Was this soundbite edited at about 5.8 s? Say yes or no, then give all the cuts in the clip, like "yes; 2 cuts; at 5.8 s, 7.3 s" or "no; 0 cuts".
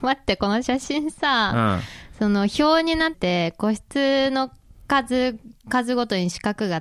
no; 1 cut; at 3.1 s